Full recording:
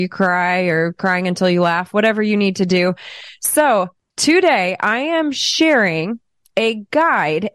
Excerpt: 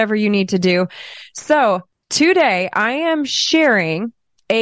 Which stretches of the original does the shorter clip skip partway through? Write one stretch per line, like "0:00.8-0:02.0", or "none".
none